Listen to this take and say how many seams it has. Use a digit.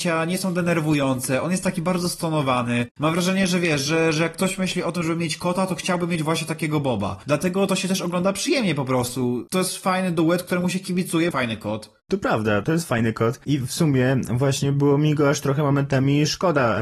1